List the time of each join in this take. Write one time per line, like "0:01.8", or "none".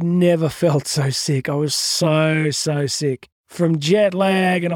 0:03.4